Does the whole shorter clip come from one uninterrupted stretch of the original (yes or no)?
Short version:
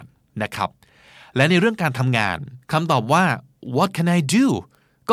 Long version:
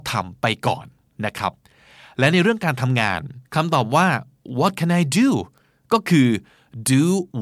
yes